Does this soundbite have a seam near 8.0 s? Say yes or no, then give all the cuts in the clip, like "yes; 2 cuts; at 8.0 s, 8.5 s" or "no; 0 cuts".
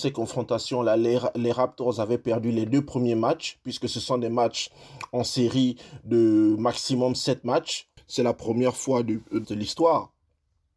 yes; 2 cuts; at 8.0 s, 9.4 s